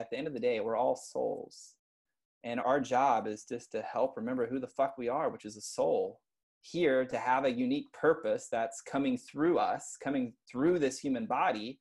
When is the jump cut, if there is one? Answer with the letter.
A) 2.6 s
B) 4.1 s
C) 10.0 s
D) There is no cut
A